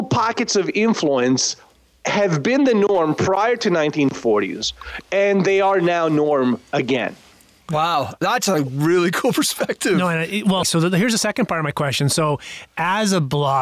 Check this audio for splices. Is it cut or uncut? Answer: cut